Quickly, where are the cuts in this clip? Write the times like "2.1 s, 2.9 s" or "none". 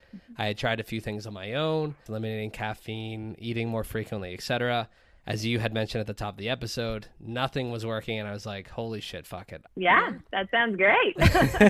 2.1 s, 9.7 s